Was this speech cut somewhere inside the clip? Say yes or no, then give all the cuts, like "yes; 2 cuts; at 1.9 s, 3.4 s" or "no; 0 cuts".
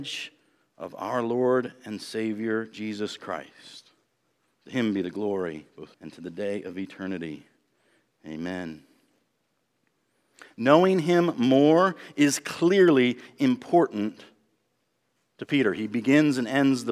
yes; 1 cut; at 5.9 s